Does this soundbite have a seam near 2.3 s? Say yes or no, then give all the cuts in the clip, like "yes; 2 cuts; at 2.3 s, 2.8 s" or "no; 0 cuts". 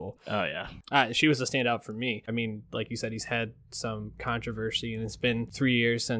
yes; 1 cut; at 2.3 s